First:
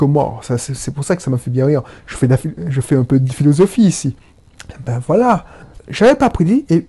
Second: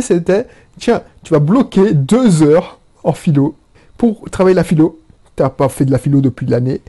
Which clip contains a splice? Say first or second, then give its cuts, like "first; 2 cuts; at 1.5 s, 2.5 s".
first; 1 cut; at 5.8 s